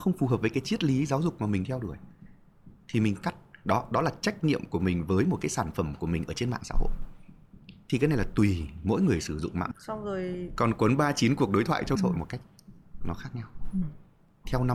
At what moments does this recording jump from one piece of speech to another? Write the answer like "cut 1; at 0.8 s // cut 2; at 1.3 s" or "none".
cut 1; at 9.7 s // cut 2; at 11.9 s